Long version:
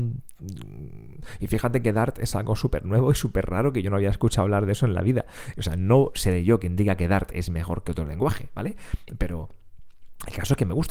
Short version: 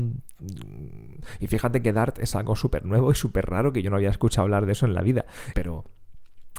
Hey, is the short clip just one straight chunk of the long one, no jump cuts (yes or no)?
no